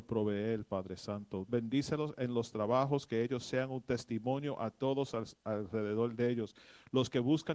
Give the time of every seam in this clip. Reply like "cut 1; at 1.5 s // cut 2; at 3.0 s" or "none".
cut 1; at 1.5 s